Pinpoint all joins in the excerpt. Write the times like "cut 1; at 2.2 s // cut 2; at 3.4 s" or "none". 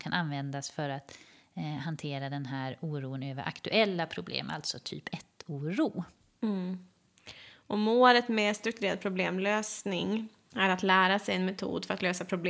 none

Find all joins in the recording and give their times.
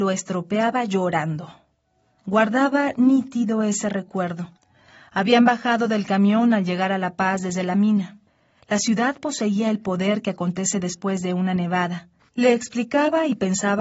cut 1; at 12.2 s

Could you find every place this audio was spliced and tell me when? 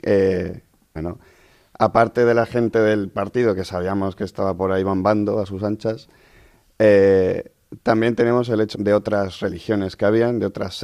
cut 1; at 1.0 s // cut 2; at 8.7 s

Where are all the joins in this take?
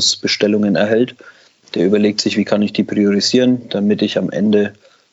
none

